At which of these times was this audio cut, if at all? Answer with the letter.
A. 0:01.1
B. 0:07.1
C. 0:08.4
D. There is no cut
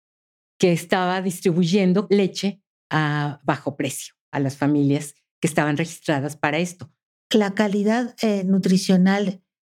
B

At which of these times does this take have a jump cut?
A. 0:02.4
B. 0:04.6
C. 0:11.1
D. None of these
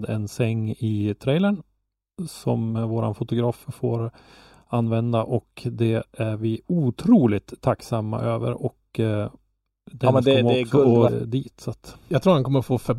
C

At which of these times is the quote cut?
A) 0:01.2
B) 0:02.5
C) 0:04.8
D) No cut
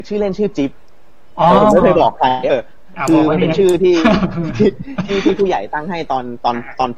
B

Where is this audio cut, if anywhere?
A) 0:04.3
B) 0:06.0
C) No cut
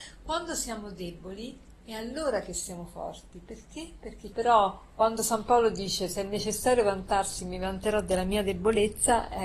A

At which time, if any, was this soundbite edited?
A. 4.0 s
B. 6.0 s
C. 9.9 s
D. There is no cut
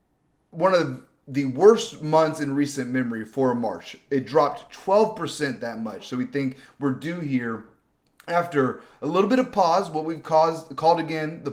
B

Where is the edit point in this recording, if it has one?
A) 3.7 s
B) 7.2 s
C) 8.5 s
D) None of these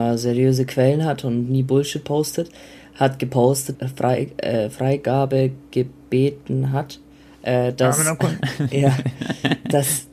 A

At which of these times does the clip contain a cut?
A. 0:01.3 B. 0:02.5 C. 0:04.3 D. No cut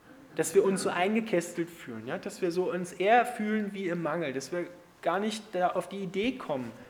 D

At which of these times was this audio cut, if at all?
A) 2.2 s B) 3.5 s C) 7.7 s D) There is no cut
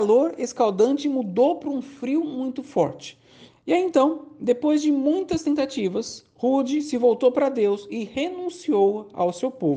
B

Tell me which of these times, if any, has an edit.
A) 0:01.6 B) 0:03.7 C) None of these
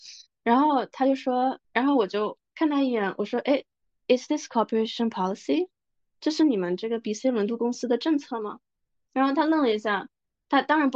A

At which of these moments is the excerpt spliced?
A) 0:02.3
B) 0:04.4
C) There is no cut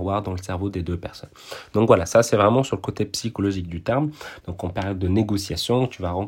B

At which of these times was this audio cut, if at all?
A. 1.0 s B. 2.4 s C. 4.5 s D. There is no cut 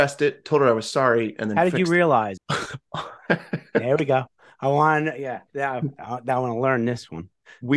B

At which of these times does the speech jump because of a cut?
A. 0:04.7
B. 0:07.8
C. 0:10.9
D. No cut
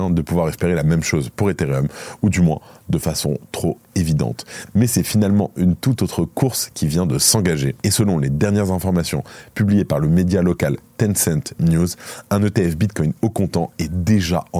B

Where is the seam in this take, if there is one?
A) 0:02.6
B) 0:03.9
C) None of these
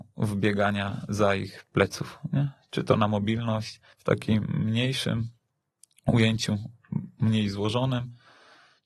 B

